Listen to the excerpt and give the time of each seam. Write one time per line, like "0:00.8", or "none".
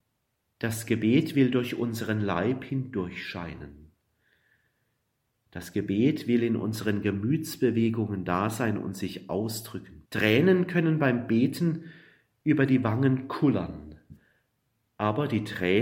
0:10.0

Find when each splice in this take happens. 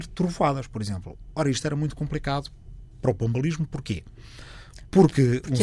none

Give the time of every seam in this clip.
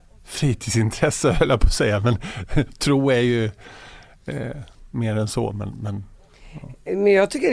none

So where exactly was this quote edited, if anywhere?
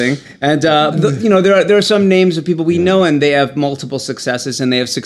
0:00.9

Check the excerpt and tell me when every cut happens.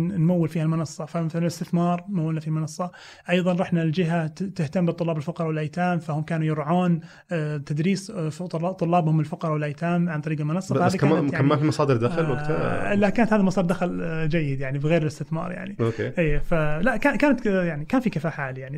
none

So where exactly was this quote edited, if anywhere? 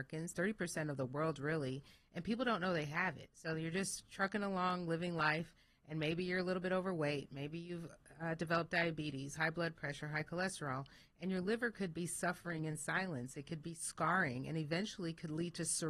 none

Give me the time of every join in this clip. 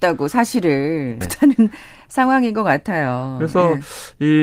0:01.2

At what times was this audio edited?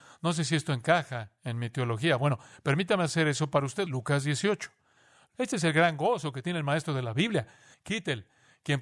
0:03.9
0:07.7

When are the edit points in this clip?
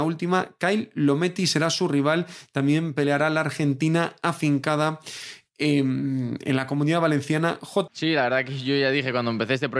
0:07.9

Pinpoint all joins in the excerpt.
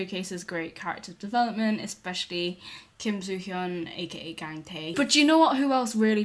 0:04.9

